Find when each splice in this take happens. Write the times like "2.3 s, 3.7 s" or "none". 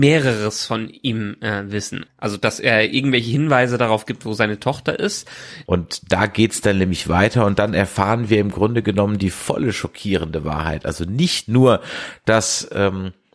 2.1 s, 5.7 s